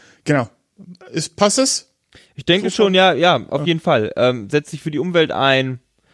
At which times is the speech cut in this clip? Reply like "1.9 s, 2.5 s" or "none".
none